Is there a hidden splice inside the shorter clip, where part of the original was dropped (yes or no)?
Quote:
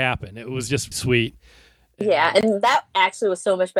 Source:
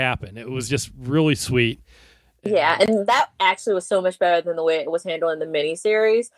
yes